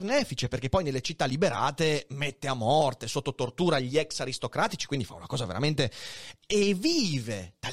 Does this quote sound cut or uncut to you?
cut